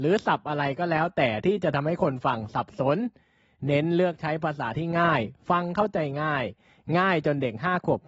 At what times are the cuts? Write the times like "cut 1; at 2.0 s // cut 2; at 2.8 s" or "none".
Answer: none